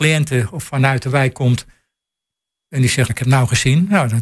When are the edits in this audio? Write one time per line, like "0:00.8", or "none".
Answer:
0:03.1